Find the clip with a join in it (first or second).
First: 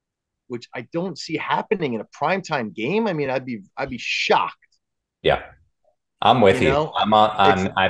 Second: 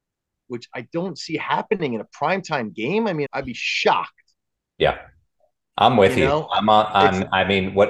second